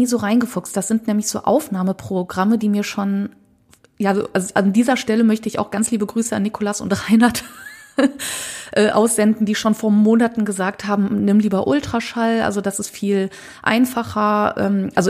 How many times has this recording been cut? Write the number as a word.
zero